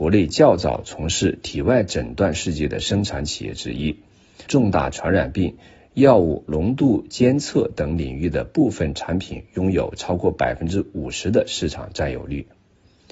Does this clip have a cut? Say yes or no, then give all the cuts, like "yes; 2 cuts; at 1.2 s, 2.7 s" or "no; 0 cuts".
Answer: yes; 1 cut; at 4.5 s